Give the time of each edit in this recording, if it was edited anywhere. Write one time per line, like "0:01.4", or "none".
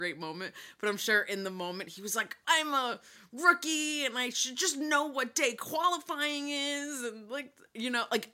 0:02.4